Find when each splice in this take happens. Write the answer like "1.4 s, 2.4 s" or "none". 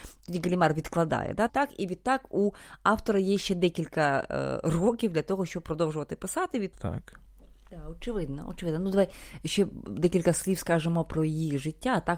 1.5 s, 6.7 s